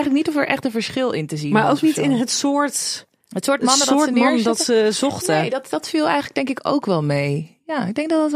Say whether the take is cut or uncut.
uncut